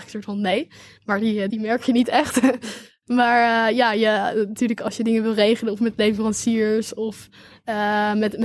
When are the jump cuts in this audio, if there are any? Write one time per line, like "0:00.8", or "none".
0:01.5